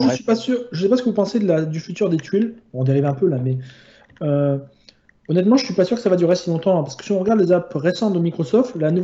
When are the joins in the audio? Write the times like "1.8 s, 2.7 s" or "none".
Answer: none